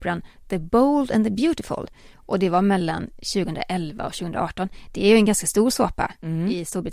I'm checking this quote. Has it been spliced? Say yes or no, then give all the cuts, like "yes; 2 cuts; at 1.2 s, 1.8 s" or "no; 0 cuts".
no; 0 cuts